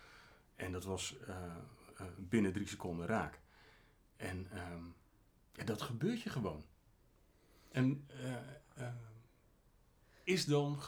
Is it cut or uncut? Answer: uncut